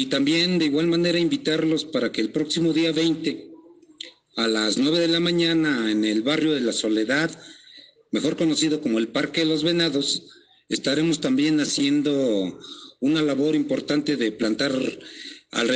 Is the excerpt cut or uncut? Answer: uncut